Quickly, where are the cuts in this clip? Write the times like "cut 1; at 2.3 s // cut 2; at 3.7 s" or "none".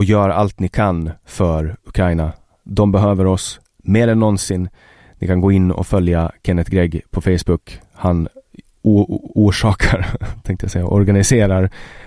none